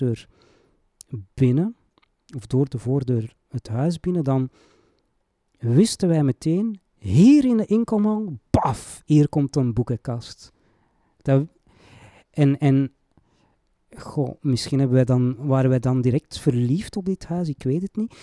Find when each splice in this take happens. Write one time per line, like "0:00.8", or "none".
none

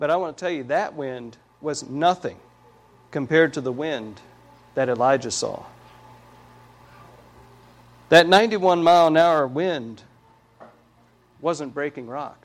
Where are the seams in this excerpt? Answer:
none

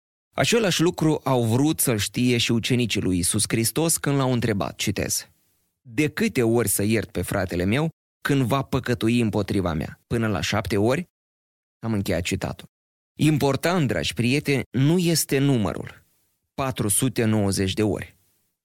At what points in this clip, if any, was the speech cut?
0:10.0
0:13.0

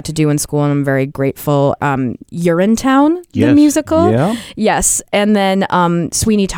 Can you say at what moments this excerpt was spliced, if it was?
0:01.8

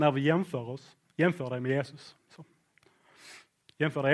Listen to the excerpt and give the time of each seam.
none

